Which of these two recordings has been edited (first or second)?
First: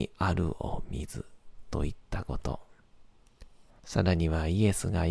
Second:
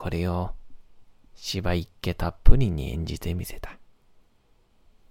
first